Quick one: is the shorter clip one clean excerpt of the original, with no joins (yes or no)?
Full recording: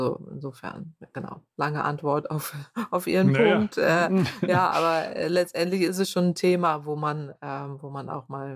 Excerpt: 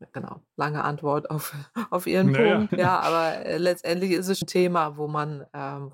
no